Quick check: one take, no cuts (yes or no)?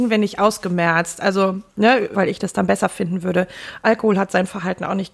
no